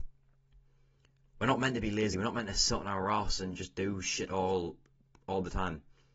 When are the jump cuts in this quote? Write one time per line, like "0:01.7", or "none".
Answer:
none